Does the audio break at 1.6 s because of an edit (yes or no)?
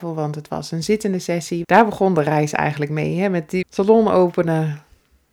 yes